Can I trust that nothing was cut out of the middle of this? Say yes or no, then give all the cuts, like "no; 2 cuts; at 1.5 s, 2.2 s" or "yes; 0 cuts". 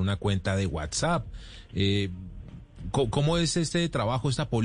yes; 0 cuts